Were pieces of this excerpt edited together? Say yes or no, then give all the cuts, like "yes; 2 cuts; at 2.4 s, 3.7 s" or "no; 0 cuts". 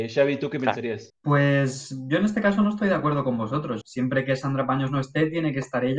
yes; 2 cuts; at 1.1 s, 3.8 s